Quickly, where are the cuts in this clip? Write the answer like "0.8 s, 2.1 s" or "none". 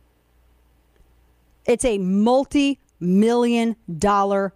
none